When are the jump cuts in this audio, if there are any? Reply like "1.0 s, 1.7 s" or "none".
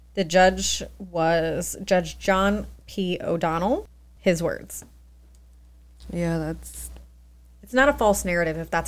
4.2 s